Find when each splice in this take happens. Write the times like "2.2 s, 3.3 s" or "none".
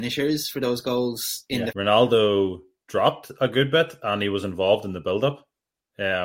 1.7 s